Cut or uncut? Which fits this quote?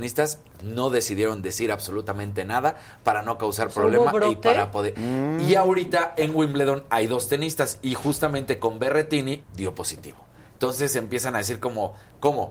cut